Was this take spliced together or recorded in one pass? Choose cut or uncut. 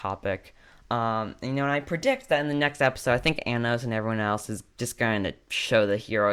uncut